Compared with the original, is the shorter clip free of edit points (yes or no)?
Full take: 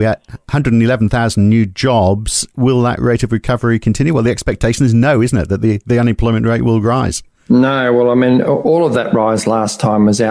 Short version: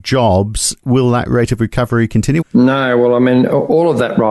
no